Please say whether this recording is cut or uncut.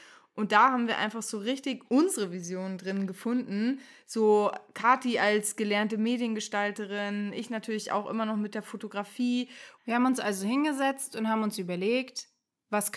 cut